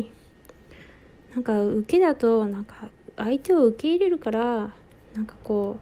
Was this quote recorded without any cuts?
yes; 0 cuts

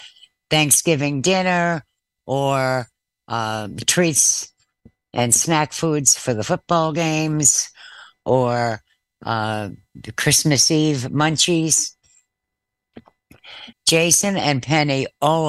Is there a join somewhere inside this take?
yes; 1 cut; at 13.7 s

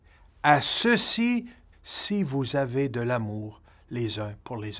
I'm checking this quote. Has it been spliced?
yes; 1 cut; at 1.7 s

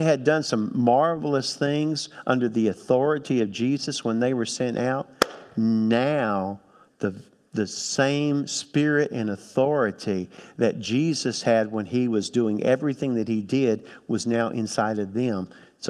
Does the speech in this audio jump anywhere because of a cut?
no; 0 cuts

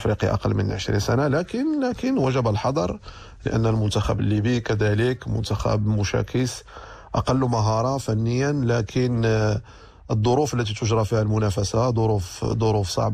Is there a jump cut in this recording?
no; 0 cuts

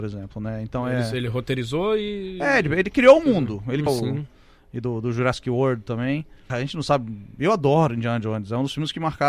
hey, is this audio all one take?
no; 2 cuts; at 3.9 s, 6.5 s

